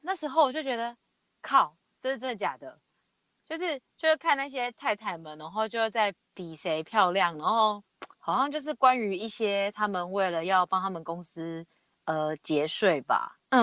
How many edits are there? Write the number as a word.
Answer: two